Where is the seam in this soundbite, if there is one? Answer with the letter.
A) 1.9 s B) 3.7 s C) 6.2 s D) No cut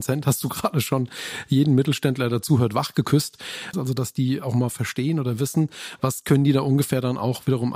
B